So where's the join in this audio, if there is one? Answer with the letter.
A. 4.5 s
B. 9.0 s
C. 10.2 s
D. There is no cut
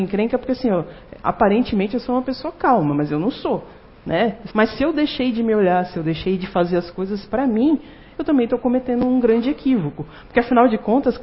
A